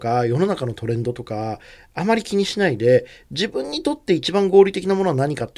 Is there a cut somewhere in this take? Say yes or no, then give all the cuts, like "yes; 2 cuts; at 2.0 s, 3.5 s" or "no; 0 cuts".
no; 0 cuts